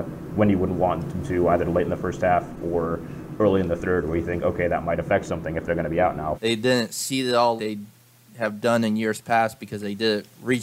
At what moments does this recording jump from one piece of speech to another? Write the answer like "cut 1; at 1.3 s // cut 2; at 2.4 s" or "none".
cut 1; at 6.3 s // cut 2; at 7.6 s